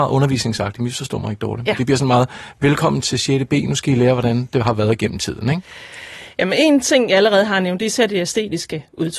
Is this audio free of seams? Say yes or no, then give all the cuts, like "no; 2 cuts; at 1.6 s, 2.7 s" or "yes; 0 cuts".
yes; 0 cuts